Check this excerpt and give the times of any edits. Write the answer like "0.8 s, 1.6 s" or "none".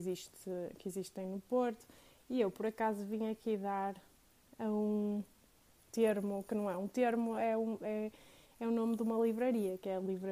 none